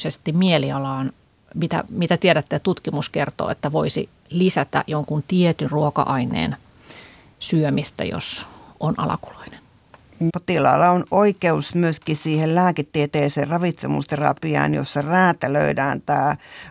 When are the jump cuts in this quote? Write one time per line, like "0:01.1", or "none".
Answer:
0:10.3